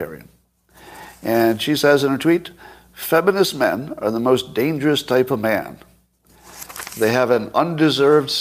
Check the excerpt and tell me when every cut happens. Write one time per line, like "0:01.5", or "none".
none